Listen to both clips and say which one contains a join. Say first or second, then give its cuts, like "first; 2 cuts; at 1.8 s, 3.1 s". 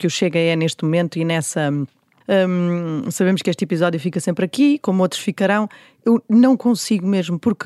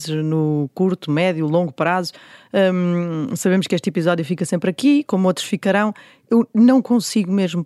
first; 1 cut; at 2.2 s